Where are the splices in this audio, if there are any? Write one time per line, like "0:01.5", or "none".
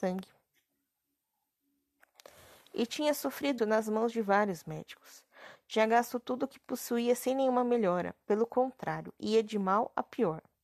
0:03.6